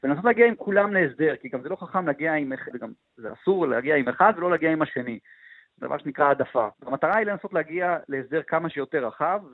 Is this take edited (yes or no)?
yes